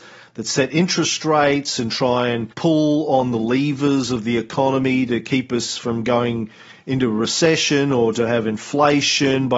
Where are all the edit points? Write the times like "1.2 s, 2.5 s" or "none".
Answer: 2.5 s

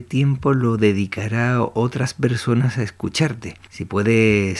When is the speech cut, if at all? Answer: 3.7 s

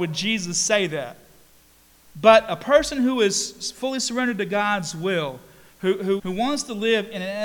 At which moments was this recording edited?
2.1 s, 6.2 s

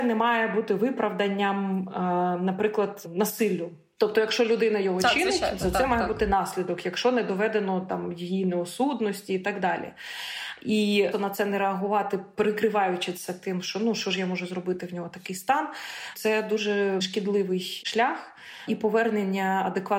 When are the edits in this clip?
11.1 s

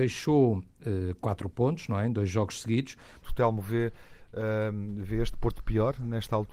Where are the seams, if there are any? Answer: 3.2 s

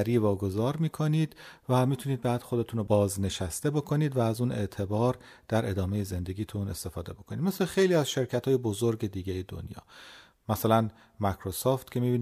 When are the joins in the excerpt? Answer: none

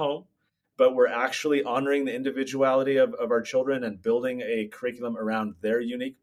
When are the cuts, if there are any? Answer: none

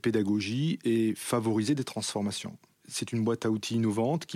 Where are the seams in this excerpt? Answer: 2.8 s

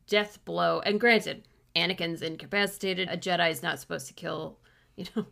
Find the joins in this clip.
3.1 s

